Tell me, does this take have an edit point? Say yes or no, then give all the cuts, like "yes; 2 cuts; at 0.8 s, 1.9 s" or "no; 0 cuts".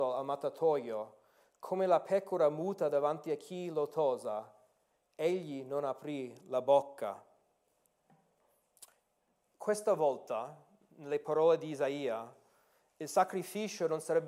no; 0 cuts